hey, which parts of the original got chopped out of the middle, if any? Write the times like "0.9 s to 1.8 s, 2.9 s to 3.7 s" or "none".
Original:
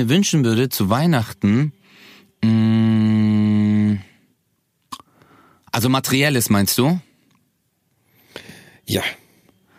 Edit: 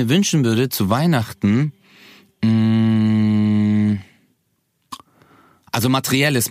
none